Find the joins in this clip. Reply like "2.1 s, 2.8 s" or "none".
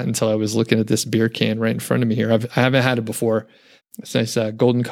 3.8 s